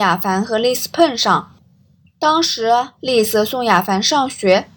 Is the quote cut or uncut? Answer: uncut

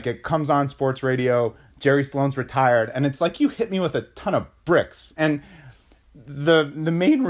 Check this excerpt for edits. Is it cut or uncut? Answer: cut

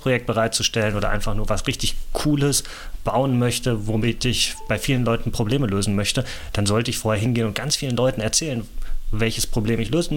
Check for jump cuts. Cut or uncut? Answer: uncut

